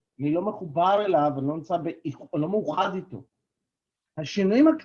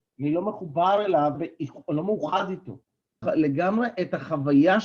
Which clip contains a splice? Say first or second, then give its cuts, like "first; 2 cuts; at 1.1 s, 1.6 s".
second; 2 cuts; at 1.3 s, 3.2 s